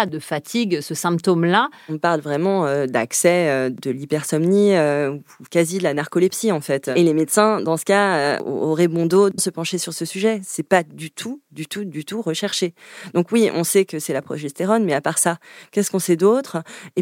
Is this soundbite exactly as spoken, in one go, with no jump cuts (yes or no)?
no